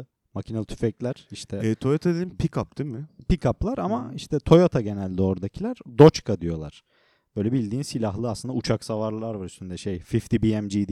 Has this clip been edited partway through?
no; 0 cuts

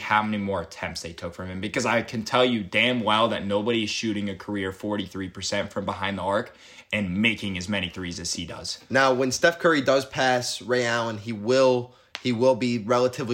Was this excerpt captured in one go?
yes; 0 cuts

